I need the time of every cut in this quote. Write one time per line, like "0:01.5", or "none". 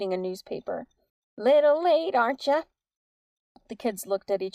none